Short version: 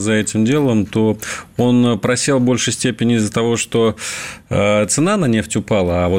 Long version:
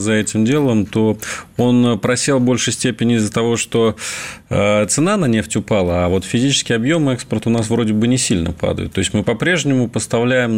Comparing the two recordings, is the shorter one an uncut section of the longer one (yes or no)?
yes